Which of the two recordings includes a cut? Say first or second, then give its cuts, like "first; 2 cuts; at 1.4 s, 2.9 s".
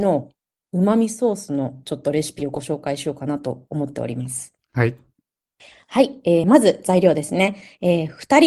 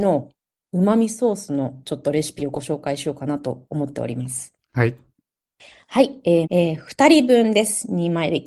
second; 1 cut; at 6.4 s